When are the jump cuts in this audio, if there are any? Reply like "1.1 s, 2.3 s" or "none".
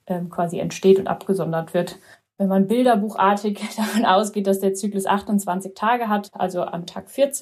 6.3 s